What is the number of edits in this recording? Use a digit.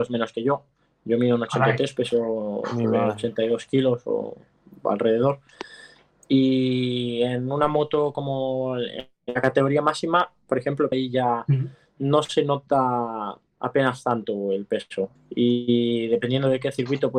2